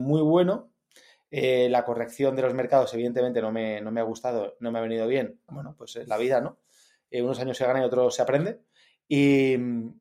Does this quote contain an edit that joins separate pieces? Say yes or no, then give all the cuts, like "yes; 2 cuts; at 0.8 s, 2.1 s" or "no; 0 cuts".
yes; 1 cut; at 5.5 s